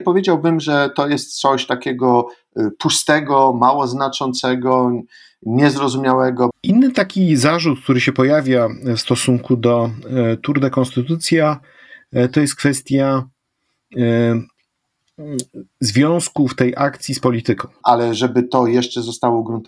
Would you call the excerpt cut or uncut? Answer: cut